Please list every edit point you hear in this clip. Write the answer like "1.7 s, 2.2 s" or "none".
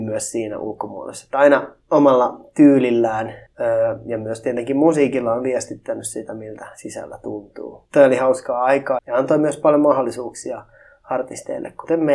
9.0 s